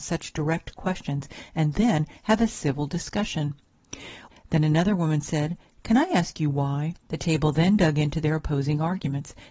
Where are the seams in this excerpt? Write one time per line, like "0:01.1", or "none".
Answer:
0:04.3
0:07.1

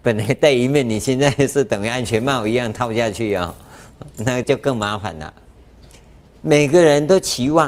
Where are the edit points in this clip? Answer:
0:04.4

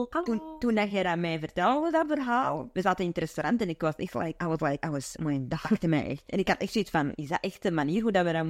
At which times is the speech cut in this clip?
none

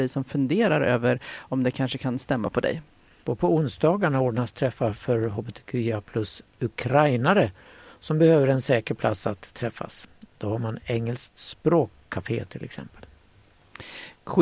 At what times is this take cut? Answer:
0:03.2

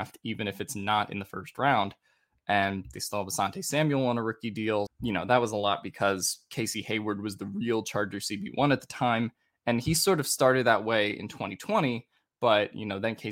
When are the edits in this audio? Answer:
0:04.9

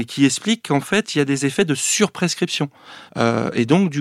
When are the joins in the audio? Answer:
0:03.1

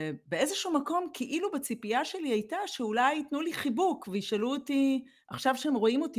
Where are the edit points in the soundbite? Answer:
none

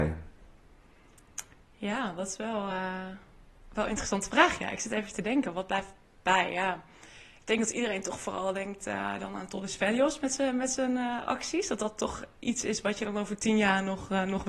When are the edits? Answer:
none

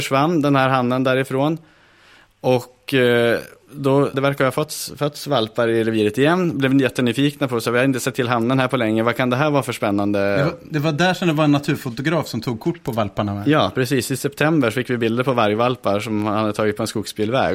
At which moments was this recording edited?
0:04.1

